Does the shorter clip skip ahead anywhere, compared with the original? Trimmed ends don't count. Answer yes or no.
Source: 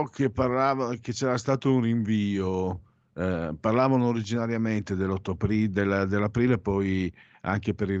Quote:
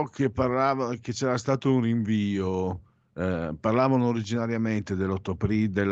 no